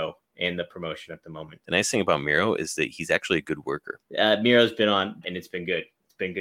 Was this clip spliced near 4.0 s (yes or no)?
yes